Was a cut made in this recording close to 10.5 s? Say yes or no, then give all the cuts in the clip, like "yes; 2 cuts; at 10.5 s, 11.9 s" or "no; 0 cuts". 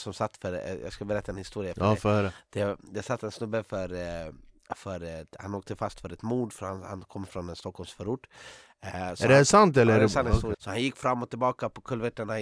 yes; 1 cut; at 10.5 s